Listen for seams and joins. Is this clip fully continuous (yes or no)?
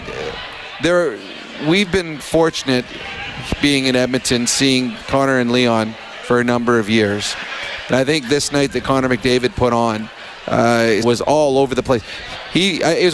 no